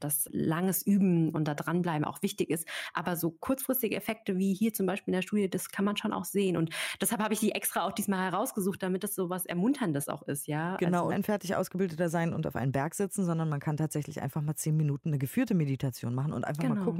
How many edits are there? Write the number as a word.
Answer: one